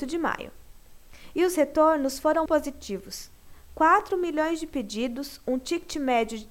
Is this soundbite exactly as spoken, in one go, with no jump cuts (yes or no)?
no